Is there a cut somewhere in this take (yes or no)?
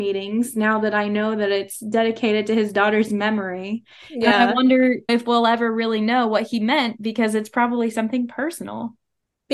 yes